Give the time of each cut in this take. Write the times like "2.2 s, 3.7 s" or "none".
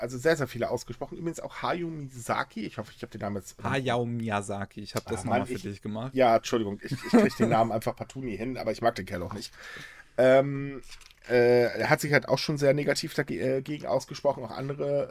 none